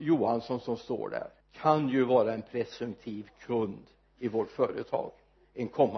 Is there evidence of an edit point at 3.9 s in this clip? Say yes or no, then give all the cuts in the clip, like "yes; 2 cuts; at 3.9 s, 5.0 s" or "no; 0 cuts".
no; 1 cut; at 1.4 s